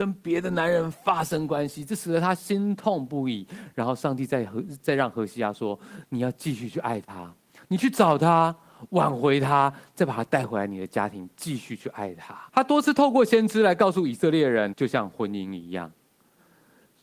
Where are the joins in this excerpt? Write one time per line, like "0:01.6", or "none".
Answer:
0:12.5
0:14.7